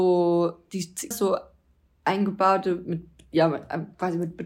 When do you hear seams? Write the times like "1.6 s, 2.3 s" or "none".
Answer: 1.1 s